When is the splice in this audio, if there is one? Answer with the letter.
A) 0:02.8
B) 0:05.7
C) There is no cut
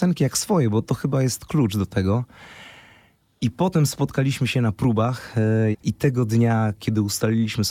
B